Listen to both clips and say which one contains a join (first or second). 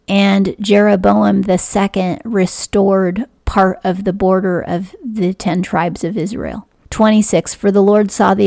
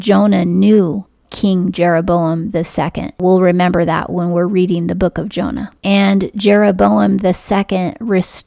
second